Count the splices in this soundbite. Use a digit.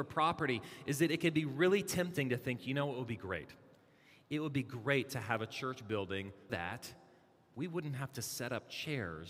1